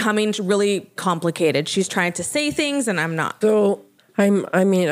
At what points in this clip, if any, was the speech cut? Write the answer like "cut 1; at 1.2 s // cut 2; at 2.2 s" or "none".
cut 1; at 1.0 s // cut 2; at 3.4 s